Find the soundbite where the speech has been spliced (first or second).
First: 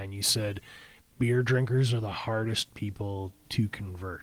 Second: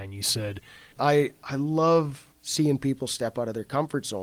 second